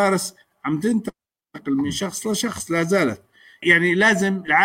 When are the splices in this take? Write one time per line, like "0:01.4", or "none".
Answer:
0:03.6